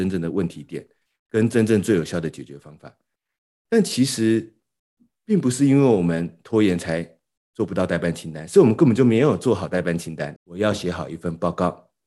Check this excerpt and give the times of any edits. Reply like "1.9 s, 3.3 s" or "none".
10.4 s